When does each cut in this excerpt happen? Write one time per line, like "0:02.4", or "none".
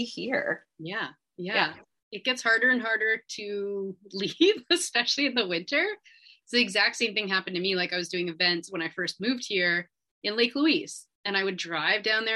none